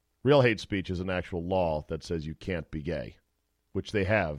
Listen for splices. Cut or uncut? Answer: uncut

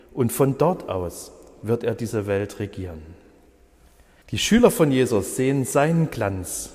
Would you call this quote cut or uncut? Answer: cut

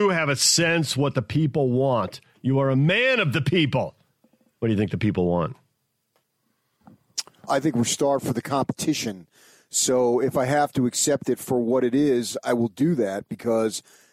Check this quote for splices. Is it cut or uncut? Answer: cut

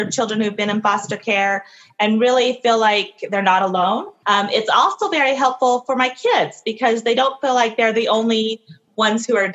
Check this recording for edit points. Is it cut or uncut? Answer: cut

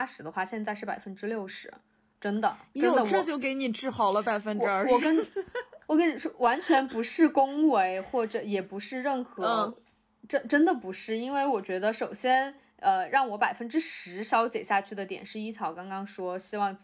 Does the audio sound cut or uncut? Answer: uncut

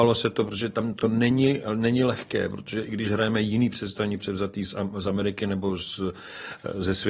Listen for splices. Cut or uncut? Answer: uncut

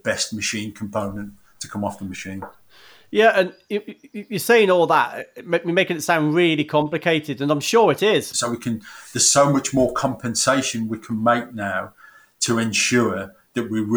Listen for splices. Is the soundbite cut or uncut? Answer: cut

